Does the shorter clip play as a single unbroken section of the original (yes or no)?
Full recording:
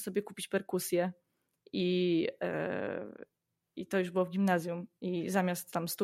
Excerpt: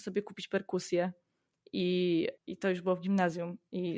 no